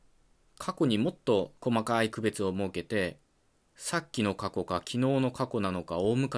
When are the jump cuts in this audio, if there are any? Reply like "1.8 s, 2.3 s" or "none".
1.6 s